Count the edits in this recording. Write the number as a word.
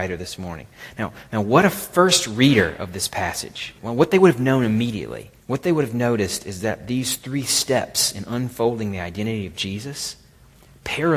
two